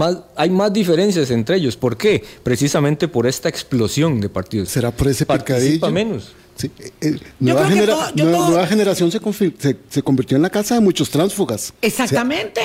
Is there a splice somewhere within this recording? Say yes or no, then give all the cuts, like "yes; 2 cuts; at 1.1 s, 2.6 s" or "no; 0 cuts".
yes; 1 cut; at 4.7 s